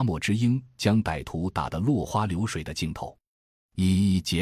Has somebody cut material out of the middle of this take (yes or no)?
no